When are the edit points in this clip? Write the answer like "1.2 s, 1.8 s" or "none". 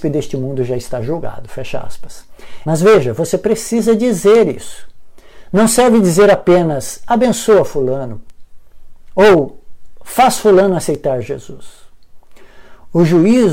2.6 s